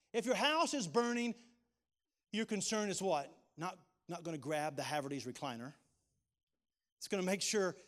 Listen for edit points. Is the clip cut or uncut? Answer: uncut